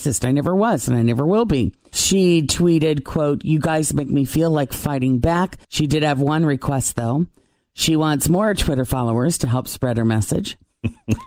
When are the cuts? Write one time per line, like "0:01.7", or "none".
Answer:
0:01.9
0:05.6